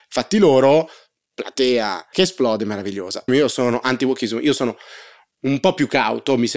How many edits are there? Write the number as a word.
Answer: two